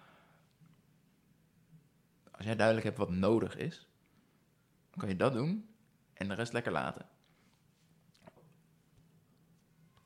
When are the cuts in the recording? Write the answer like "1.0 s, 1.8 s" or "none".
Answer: 2.2 s, 8.4 s